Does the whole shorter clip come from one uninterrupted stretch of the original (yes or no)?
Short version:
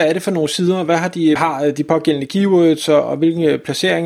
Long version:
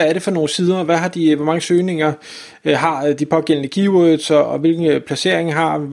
no